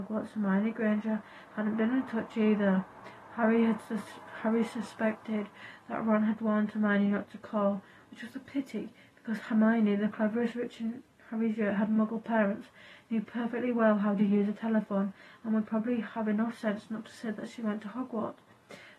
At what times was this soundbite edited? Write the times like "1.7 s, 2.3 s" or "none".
none